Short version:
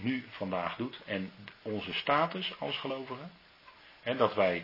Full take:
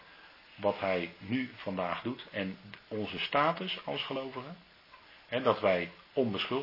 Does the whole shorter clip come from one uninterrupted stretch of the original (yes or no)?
yes